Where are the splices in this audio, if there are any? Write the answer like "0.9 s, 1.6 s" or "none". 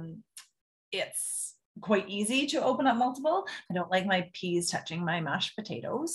3.7 s